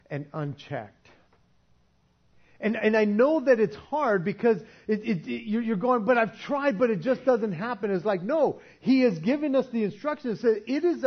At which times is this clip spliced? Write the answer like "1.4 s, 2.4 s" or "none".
none